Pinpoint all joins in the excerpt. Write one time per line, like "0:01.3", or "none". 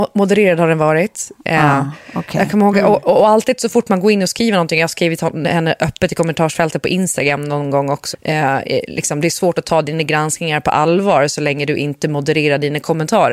0:08.1